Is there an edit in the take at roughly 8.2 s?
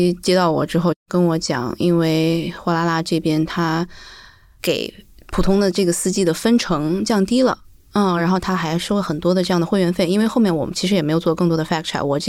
no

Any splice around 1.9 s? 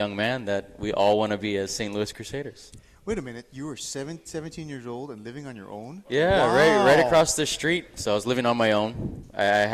no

